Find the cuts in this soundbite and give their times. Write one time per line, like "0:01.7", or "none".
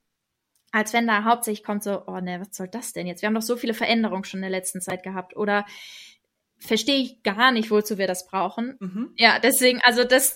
0:08.8